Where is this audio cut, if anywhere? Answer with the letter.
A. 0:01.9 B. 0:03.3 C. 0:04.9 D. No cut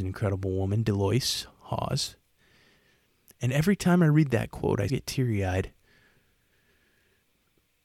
C